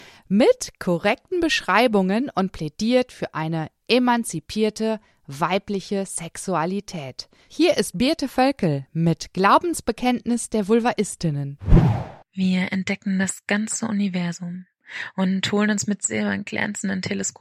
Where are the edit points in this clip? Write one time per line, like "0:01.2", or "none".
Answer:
0:12.2